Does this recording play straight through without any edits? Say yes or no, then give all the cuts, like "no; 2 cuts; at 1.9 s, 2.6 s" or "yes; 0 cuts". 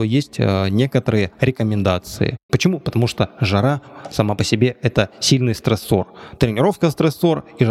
no; 1 cut; at 2.5 s